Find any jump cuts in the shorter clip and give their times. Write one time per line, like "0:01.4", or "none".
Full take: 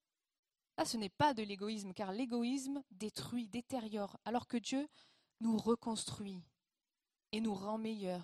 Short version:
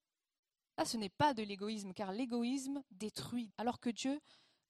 0:03.5